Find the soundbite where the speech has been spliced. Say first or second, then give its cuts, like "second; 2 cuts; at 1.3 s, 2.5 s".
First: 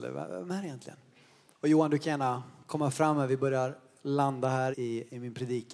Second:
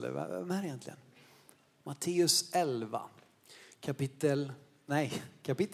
first; 2 cuts; at 1.5 s, 4.7 s